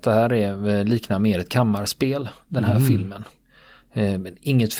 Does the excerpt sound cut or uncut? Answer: uncut